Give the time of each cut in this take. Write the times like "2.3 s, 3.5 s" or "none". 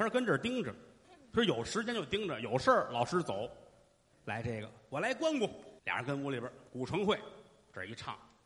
4.1 s, 5.8 s